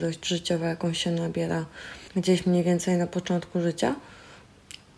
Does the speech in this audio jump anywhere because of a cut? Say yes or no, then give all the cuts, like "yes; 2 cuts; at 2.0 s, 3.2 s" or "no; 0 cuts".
yes; 1 cut; at 2.1 s